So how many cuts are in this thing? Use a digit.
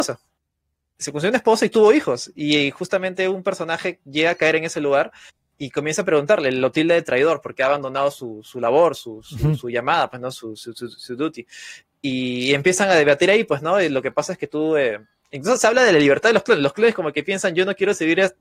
0